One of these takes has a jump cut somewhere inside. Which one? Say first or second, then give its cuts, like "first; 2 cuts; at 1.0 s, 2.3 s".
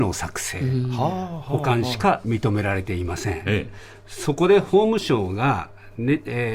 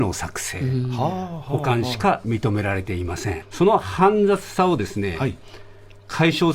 second; 1 cut; at 3.4 s